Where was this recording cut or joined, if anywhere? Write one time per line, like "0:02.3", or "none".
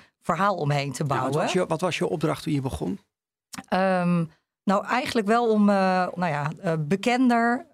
0:06.2